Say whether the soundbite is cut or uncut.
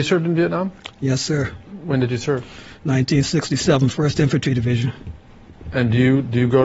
uncut